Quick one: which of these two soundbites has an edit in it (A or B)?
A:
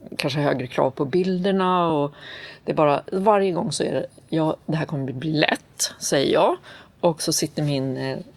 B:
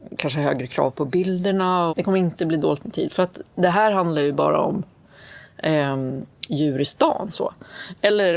B